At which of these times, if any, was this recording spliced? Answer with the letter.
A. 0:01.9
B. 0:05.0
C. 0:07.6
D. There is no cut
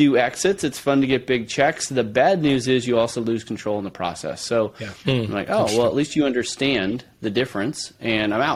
B